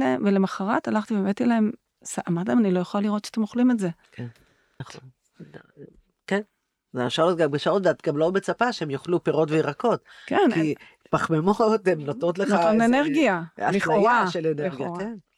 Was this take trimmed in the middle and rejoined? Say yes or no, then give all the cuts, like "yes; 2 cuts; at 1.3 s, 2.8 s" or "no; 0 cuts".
yes; 1 cut; at 4.8 s